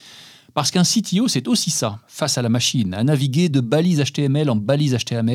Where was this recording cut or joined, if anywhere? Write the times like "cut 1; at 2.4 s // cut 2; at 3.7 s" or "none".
cut 1; at 2.0 s